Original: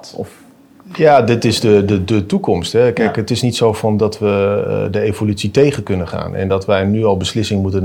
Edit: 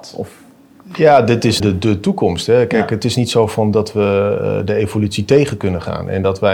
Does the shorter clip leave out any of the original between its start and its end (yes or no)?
yes